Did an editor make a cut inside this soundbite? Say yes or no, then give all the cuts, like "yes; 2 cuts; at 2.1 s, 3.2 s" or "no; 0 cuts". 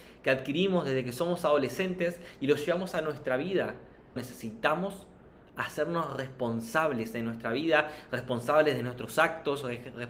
yes; 1 cut; at 4.2 s